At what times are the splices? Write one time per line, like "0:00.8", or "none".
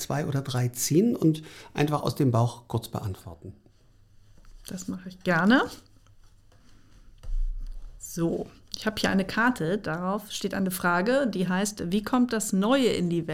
none